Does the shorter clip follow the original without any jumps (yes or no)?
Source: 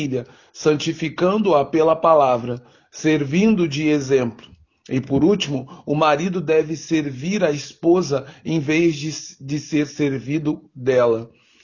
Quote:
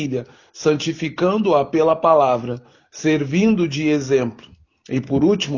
yes